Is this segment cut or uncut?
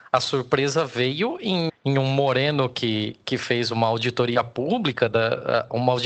cut